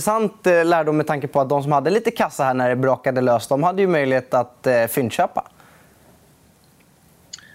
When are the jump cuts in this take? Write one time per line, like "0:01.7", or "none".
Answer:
none